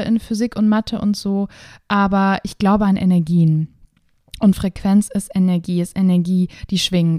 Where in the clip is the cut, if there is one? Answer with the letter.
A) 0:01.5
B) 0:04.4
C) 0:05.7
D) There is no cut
D